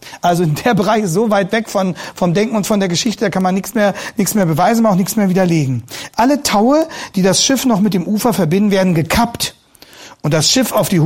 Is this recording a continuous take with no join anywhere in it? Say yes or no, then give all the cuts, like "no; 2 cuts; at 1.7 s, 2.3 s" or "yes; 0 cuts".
yes; 0 cuts